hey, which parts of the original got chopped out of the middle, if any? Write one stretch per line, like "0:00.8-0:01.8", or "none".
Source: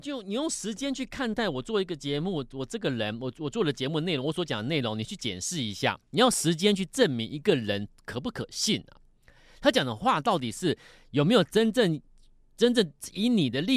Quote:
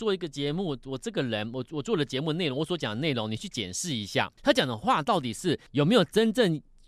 0:06.1-0:09.6
0:10.8-0:11.1